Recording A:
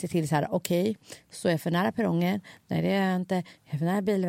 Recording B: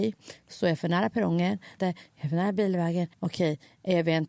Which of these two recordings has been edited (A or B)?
B